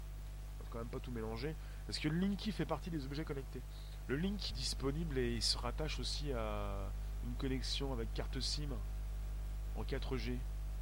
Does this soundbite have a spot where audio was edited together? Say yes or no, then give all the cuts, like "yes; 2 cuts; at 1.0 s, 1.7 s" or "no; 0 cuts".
yes; 1 cut; at 4.5 s